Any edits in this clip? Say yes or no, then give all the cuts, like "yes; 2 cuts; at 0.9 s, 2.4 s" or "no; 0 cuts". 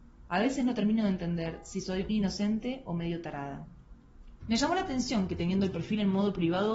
yes; 2 cuts; at 2.1 s, 4.4 s